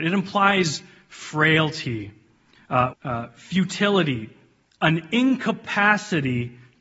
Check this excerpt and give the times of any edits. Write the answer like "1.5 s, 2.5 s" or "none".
2.9 s